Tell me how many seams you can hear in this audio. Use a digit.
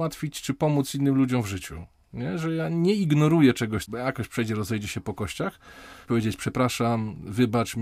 2